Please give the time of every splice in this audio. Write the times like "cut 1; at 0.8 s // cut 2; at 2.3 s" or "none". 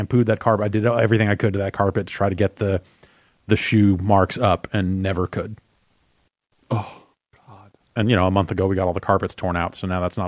cut 1; at 8.0 s